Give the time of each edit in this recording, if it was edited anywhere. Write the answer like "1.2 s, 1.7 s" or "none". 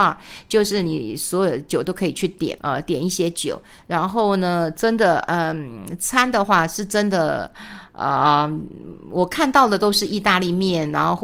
2.6 s